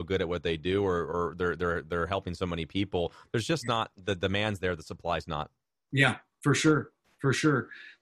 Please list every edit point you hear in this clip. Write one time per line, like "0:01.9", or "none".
none